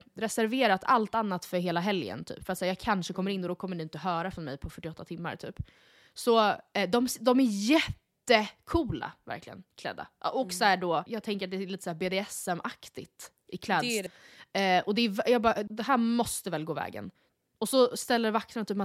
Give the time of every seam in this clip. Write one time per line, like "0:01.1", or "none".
0:11.1
0:14.1
0:15.7